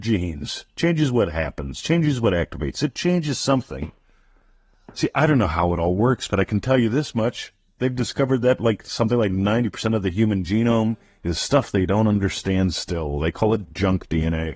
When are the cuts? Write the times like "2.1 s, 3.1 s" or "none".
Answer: none